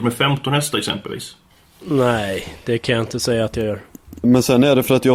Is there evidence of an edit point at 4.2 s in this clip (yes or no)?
yes